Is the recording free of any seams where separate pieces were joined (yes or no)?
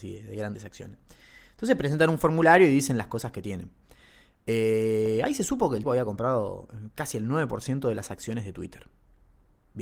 no